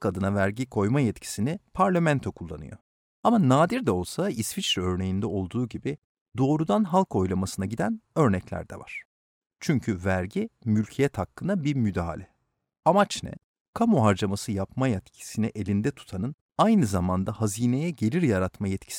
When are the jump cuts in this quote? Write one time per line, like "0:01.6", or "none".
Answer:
0:09.4